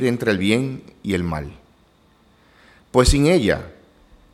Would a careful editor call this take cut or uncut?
uncut